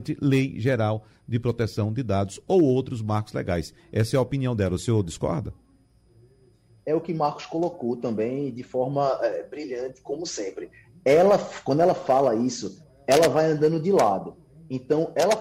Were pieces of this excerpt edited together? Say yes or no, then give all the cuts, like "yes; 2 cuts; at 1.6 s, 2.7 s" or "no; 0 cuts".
no; 0 cuts